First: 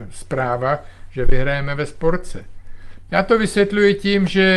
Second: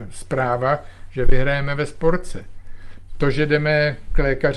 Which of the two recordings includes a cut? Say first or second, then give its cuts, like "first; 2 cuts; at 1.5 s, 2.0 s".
first; 1 cut; at 3.1 s